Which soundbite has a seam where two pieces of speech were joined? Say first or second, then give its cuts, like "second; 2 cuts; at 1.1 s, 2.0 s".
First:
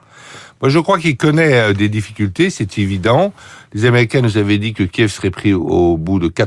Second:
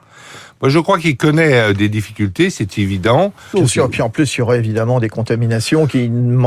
second; 1 cut; at 3.5 s